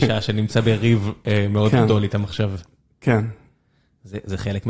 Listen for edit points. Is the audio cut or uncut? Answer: uncut